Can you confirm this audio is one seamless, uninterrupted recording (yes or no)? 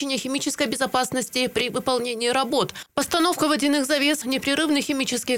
no